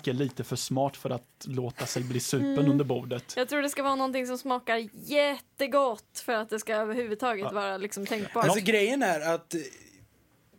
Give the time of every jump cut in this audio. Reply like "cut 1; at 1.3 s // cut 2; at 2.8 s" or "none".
none